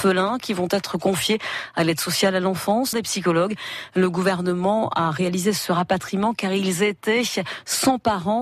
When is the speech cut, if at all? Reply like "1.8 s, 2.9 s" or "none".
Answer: 2.9 s